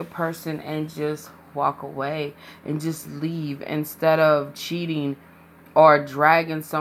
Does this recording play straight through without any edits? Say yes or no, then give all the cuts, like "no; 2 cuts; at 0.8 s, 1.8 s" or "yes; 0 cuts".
yes; 0 cuts